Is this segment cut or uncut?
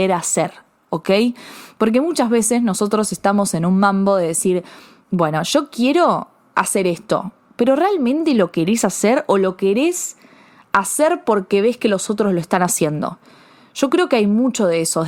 uncut